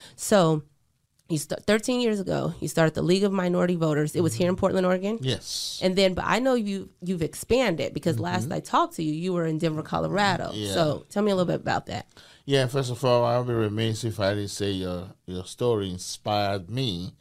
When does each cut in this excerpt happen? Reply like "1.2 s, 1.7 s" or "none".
none